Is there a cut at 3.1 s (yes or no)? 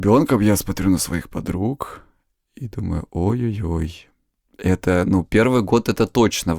no